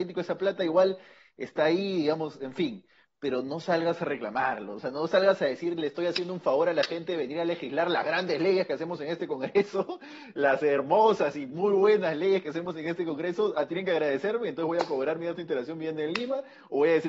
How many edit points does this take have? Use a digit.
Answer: 0